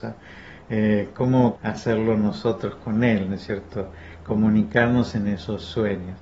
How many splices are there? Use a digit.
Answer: 1